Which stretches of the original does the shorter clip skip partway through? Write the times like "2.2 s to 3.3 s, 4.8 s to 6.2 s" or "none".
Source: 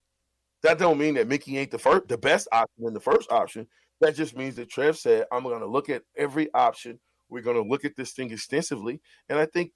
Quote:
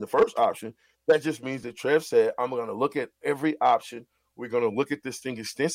none